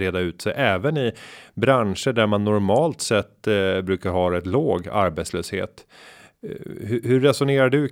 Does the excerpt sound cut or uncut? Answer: uncut